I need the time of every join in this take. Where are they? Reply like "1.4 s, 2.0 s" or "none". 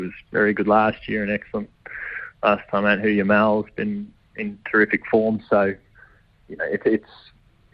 none